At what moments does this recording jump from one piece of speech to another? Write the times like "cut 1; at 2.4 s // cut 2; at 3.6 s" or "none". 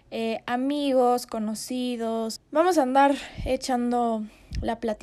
cut 1; at 2.4 s